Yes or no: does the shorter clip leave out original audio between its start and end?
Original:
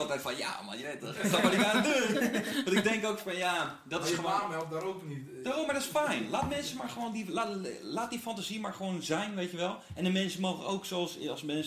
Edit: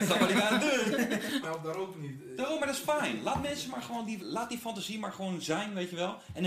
yes